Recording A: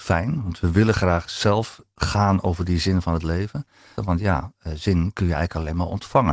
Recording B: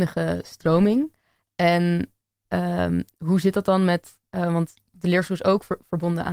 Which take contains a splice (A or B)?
A